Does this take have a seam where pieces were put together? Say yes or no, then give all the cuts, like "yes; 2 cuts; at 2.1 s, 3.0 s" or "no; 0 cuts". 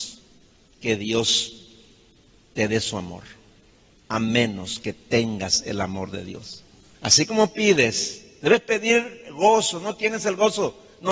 yes; 1 cut; at 6.9 s